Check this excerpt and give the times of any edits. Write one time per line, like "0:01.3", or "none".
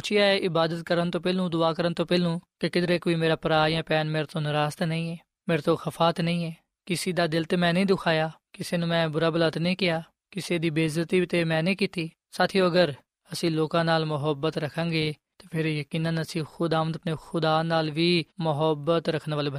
0:18.3